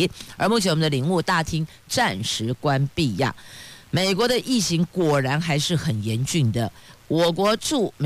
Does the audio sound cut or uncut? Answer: uncut